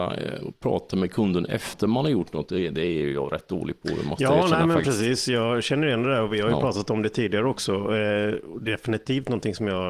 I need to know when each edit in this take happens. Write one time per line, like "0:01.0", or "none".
none